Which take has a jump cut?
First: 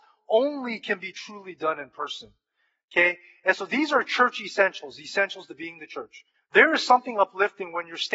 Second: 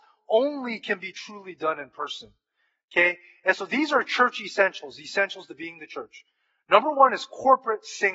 first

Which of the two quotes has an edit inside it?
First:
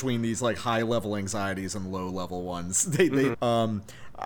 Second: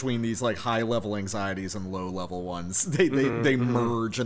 first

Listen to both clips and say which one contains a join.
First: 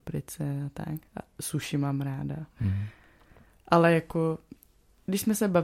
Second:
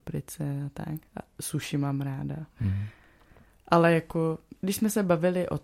second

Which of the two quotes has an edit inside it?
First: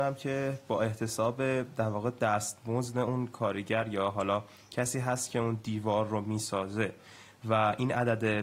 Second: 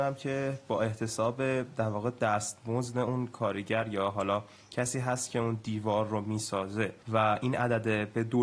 second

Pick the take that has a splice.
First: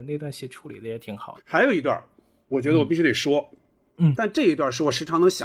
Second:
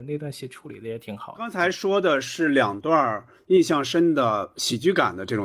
first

